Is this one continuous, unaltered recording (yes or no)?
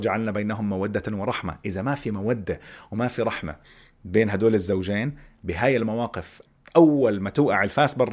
yes